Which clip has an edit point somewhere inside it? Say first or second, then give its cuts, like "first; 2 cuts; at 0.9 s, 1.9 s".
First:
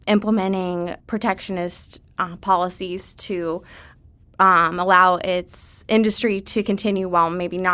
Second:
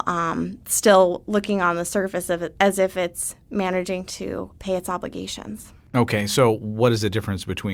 first; 1 cut; at 1.0 s